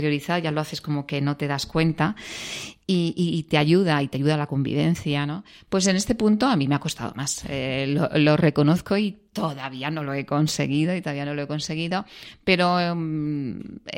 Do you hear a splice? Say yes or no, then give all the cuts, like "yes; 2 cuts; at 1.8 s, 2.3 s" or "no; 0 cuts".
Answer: no; 0 cuts